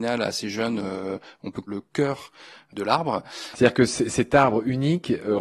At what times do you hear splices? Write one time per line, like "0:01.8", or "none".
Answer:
0:01.7
0:03.5

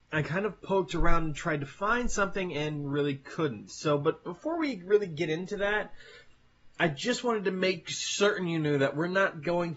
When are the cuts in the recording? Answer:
none

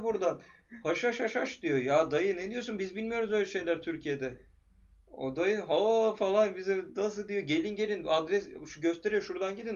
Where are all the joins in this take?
none

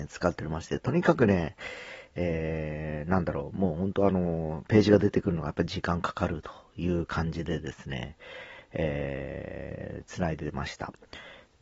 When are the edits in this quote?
none

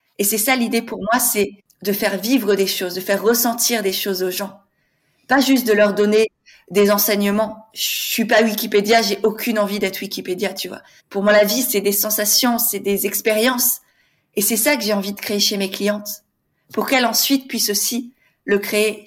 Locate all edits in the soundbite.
0:11.0

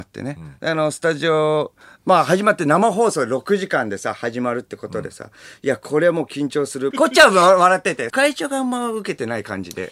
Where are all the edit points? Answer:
0:06.9
0:08.1

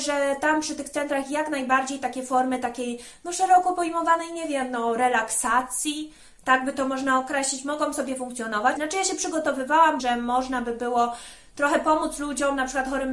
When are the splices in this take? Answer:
0:08.8
0:10.0

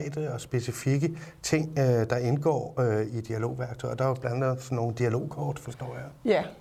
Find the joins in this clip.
none

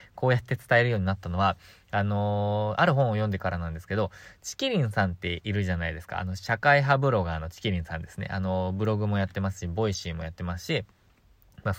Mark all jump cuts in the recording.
none

